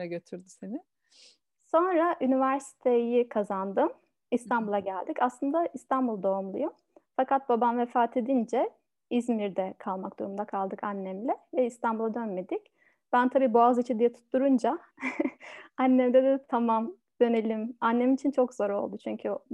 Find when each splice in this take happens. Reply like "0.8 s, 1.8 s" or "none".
none